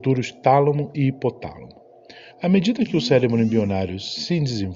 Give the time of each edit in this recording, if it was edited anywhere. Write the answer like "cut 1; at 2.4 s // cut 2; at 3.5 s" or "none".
cut 1; at 2.3 s